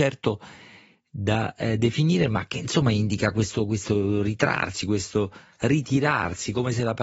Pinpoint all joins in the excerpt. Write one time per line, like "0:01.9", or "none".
none